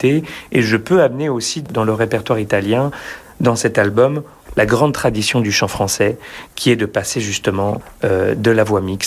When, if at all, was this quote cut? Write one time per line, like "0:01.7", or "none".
none

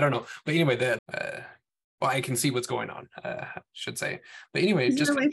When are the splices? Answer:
0:01.0

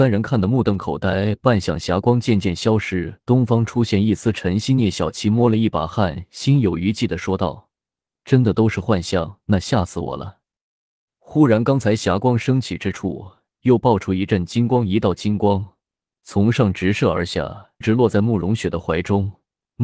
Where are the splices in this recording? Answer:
0:11.1
0:17.8

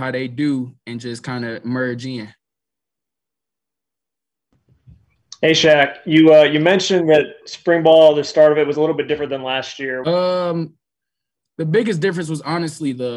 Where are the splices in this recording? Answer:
0:10.0

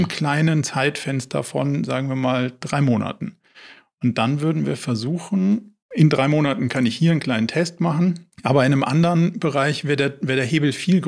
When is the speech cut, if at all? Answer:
0:05.8
0:08.3

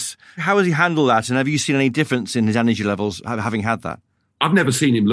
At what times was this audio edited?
none

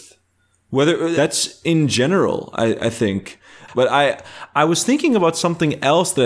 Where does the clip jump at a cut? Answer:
0:01.1
0:03.7

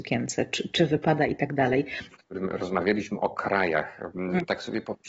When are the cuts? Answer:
0:02.1

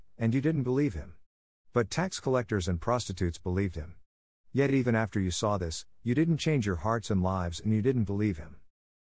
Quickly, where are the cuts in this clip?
none

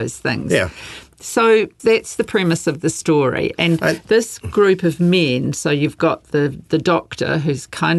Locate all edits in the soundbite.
0:01.8

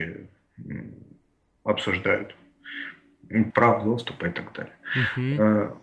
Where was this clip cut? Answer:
0:03.5

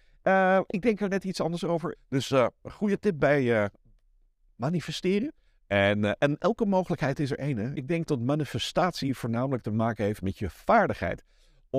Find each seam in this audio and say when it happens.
0:01.9
0:05.5
0:07.7

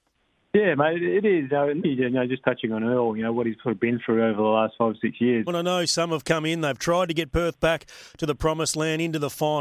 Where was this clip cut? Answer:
0:01.8
0:05.5

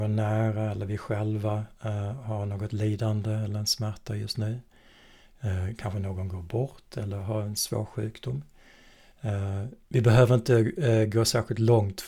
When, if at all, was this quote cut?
0:09.8

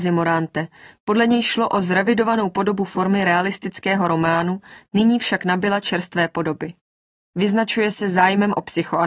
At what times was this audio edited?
0:04.9

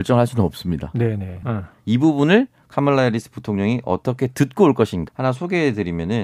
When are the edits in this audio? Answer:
0:01.4
0:05.1

